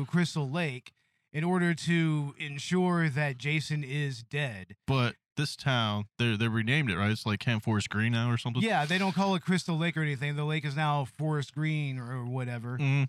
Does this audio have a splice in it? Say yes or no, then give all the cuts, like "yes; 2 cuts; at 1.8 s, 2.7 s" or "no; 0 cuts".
no; 0 cuts